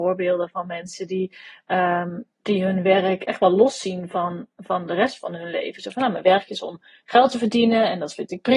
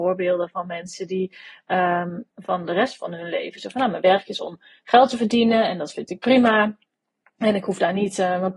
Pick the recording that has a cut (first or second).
second